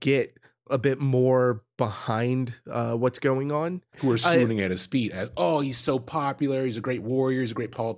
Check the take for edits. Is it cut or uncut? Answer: cut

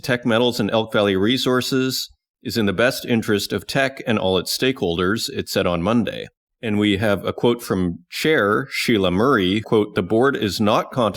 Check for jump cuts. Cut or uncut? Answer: cut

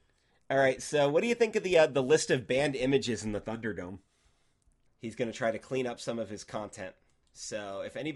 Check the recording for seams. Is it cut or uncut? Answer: cut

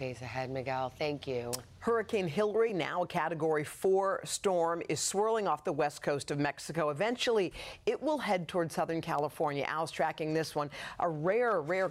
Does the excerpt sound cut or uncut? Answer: uncut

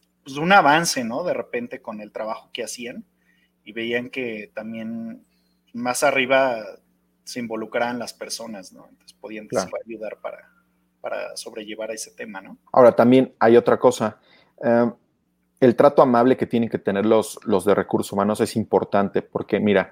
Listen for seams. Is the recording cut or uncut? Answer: cut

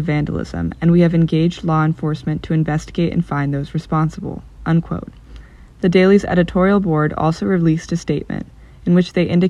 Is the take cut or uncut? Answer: uncut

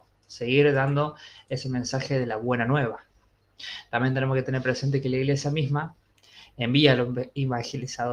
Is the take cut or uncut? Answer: uncut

